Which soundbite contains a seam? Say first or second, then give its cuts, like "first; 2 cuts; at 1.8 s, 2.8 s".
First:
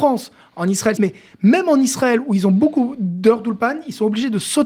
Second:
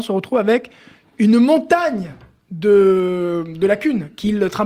first; 1 cut; at 1.0 s